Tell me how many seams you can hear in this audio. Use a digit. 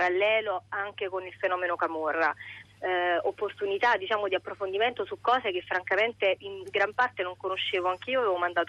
1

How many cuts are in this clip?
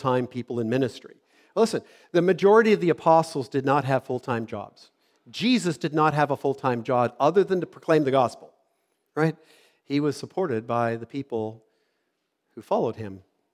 0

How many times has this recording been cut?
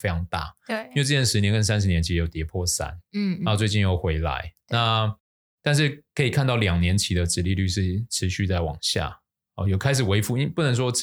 0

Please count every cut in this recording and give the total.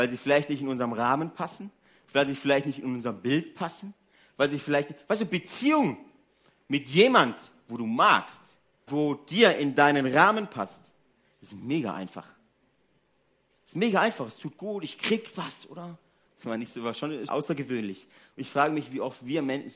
3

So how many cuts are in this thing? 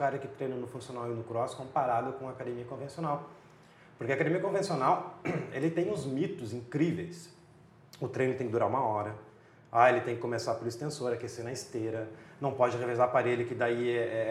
0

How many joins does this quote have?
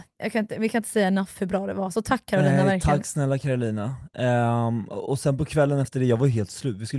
0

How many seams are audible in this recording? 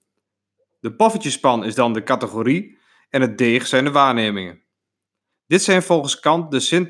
1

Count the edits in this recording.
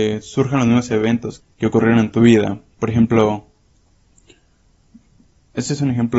1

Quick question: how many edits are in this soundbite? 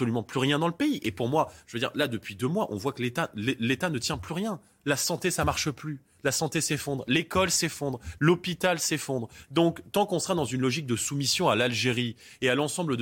2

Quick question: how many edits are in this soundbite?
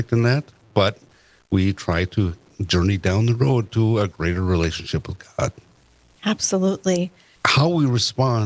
1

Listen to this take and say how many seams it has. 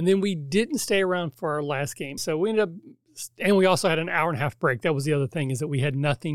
1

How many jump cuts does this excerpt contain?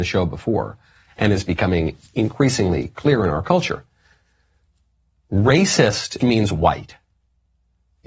1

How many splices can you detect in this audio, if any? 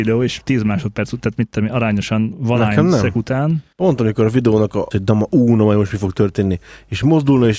2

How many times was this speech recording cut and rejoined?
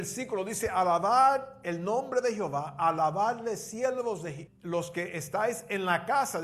1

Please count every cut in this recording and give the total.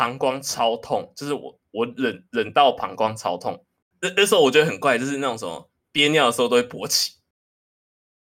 0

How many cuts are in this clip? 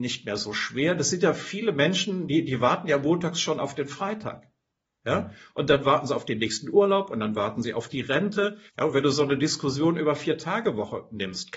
1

